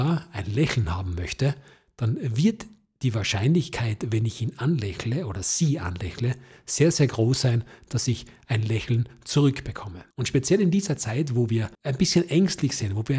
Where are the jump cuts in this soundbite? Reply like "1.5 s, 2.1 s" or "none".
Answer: 10.1 s, 11.7 s